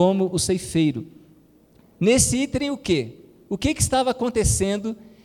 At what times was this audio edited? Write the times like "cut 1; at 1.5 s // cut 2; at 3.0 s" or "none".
cut 1; at 1.8 s